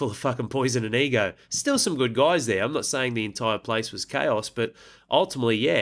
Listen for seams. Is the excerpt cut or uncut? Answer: uncut